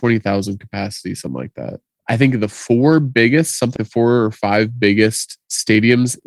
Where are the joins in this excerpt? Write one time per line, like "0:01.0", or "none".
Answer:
0:02.0
0:03.8